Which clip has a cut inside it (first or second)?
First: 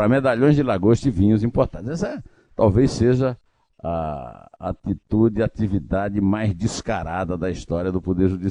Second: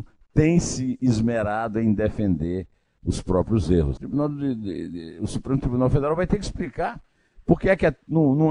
second